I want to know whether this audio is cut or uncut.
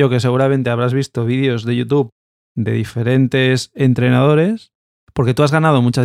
cut